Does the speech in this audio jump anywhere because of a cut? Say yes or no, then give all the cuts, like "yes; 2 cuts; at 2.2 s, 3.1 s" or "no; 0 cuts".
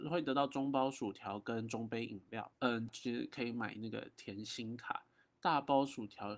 yes; 2 cuts; at 2.9 s, 5.3 s